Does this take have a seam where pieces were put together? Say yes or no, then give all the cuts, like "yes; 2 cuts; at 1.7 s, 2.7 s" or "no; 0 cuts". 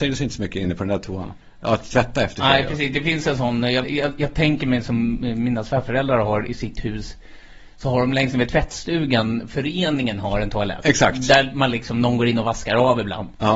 yes; 1 cut; at 3.8 s